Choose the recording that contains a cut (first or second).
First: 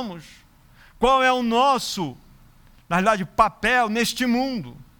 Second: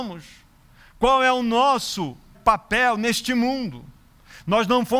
second